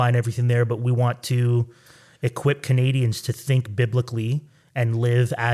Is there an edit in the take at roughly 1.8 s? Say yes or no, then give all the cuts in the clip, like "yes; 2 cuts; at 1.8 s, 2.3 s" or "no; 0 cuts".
no; 0 cuts